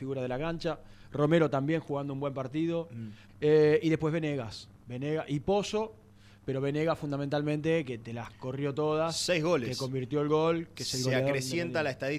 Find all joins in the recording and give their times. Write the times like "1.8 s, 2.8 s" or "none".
3.3 s